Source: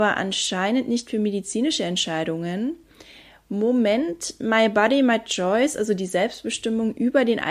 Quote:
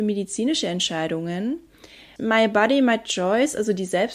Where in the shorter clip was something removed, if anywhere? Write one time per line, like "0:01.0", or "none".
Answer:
0:02.2